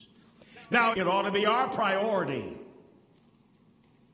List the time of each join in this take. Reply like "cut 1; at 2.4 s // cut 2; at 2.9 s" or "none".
cut 1; at 0.9 s